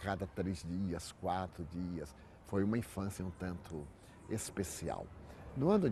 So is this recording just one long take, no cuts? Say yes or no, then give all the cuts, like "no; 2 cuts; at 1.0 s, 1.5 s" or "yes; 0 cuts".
no; 1 cut; at 3.2 s